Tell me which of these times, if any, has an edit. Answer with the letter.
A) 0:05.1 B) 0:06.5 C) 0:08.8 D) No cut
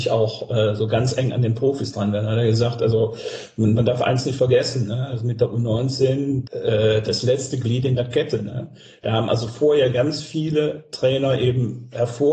B